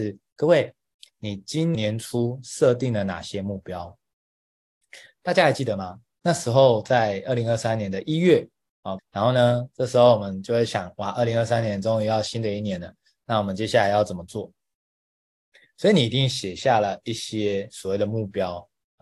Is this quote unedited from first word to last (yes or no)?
no